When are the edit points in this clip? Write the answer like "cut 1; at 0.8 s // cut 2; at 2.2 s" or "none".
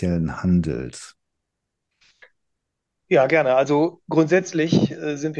none